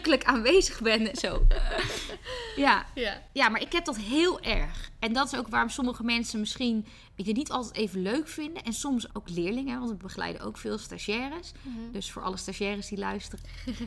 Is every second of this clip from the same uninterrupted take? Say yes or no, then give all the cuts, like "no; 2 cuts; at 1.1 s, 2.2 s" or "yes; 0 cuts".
no; 1 cut; at 9.1 s